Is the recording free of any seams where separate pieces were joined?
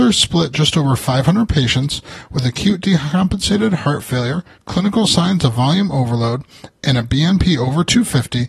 yes; 0 cuts

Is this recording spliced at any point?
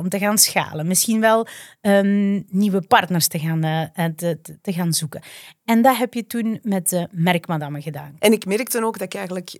yes; 1 cut; at 8.2 s

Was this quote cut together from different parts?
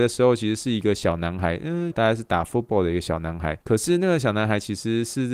yes; 2 cuts; at 1.9 s, 3.6 s

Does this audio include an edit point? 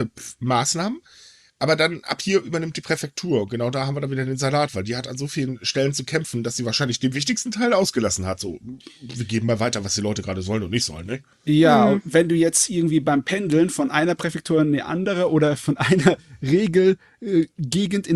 no; 0 cuts

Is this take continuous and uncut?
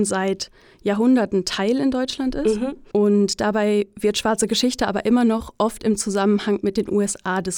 no; 1 cut; at 2.9 s

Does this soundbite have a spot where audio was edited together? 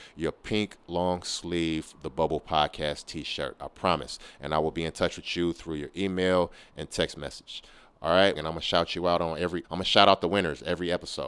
yes; 2 cuts; at 8.4 s, 9.6 s

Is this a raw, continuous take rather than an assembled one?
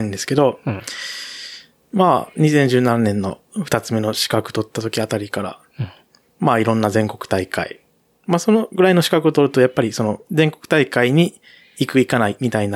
no; 1 cut; at 10.2 s

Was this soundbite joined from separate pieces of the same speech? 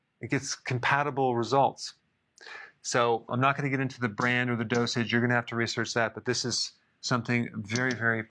yes; 1 cut; at 3.3 s

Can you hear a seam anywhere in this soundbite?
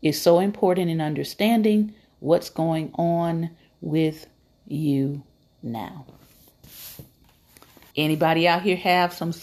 yes; 1 cut; at 7.9 s

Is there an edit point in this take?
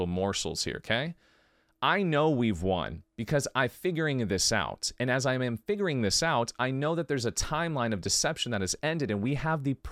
no; 0 cuts

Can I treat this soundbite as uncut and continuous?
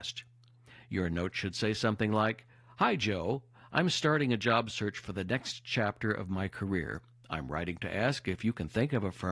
yes; 0 cuts

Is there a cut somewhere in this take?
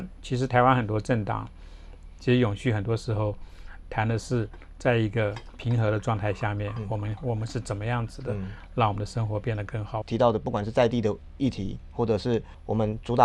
yes; 2 cuts; at 2.2 s, 10.0 s

